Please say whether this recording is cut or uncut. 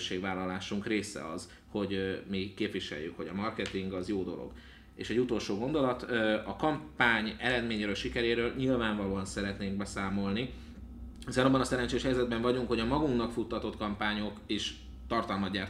uncut